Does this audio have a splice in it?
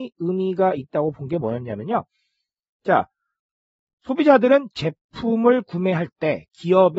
no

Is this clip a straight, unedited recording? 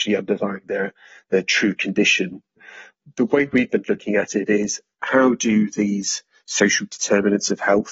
yes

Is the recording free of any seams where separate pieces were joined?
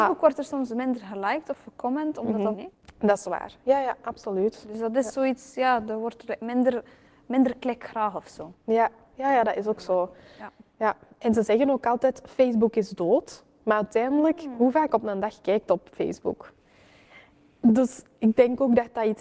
no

